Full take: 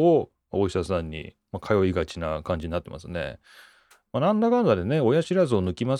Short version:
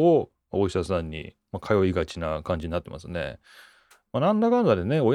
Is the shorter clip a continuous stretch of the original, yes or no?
yes